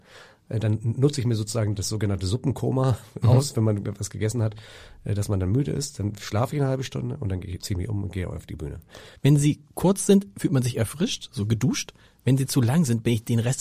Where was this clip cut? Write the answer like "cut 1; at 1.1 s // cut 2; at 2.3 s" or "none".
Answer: cut 1; at 9.2 s